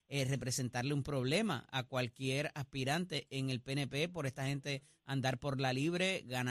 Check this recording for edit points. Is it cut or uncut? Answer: uncut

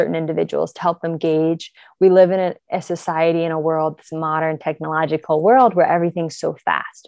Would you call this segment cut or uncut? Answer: uncut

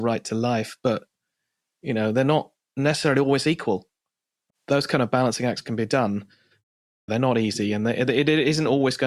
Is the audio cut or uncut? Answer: cut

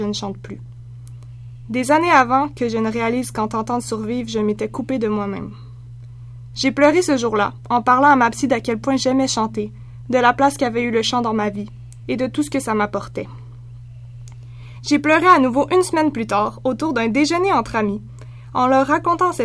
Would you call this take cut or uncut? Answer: cut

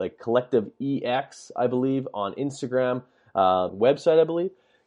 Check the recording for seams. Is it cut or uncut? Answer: cut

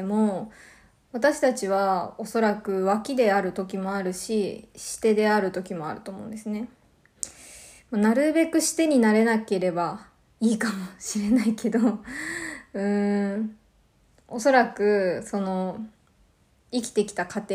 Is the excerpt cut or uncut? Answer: uncut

